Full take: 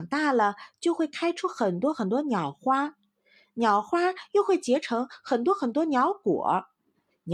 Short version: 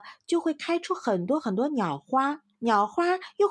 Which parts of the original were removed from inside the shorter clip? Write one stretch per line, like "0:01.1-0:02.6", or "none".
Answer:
0:03.1-0:03.5

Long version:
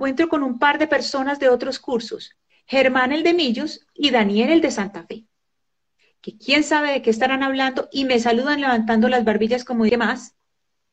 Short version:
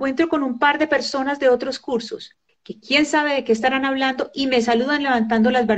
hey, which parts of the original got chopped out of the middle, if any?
0:02.5-0:06.1

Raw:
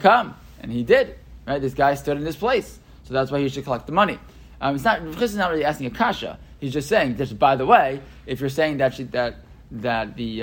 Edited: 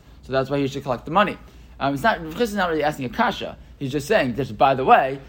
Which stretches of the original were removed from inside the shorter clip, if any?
none

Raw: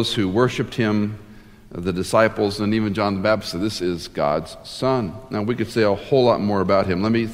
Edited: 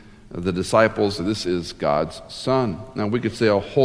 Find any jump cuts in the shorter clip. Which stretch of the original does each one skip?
0:02.6-0:03.5

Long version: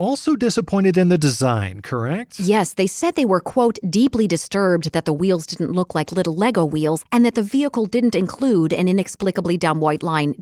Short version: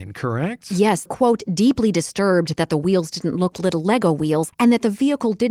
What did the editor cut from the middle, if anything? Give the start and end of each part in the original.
0:02.7-0:03.4
0:05.9-0:06.0

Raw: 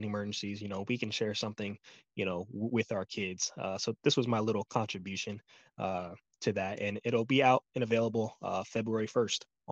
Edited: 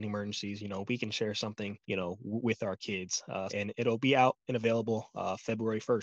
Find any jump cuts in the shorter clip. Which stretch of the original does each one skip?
0:01.8-0:02.1
0:03.8-0:06.8

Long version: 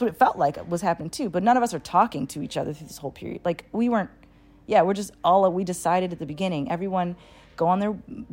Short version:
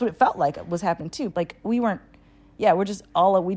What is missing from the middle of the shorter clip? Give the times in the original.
0:01.3-0:03.4

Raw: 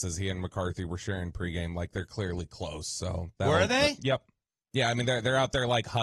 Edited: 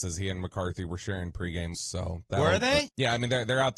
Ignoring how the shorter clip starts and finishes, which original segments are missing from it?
0:01.7-0:02.8
0:04.0-0:04.6

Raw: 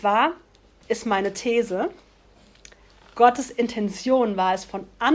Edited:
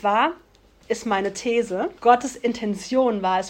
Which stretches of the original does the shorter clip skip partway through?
0:02.0-0:03.1

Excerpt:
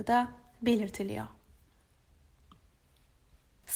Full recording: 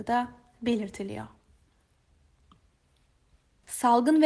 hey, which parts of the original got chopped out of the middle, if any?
none

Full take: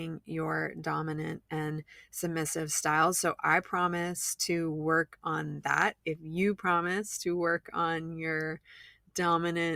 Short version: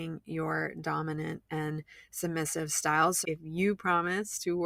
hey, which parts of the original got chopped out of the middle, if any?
0:03.2-0:06.0

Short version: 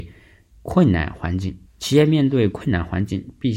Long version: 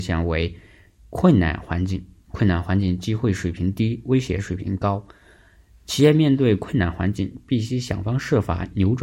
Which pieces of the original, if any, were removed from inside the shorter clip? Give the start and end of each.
0:02.1-0:05.7

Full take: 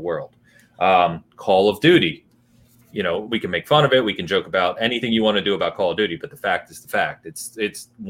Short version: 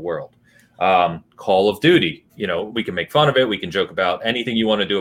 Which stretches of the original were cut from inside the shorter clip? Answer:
0:02.3-0:02.9

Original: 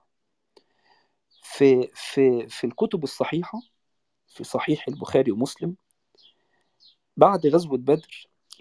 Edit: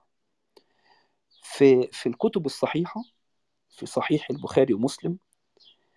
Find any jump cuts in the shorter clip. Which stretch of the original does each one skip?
0:01.9-0:02.5

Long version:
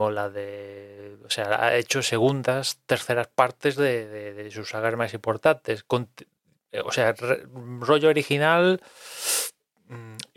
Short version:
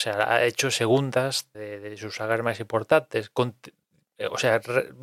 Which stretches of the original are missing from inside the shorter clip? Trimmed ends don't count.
0:02.9-0:04.1

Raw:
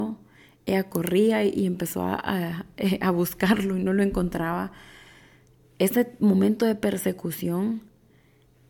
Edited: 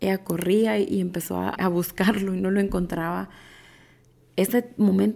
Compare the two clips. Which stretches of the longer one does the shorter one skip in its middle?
0:02.2-0:03.0

